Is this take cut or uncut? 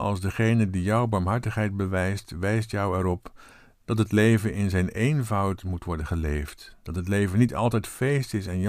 uncut